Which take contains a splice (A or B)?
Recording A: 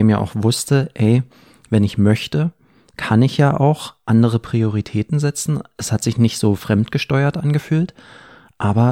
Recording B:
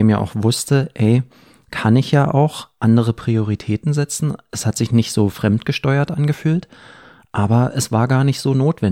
B